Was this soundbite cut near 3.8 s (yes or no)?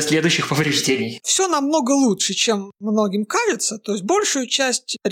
no